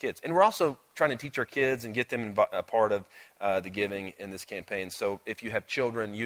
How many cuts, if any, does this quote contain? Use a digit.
0